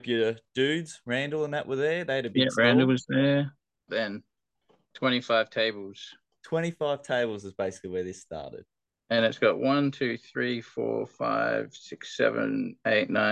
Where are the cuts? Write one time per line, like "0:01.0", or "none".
0:03.9